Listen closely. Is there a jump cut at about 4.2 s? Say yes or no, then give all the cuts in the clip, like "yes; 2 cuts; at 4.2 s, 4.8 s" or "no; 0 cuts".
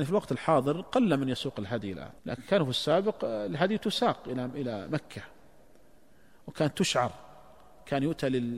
no; 1 cut; at 2.2 s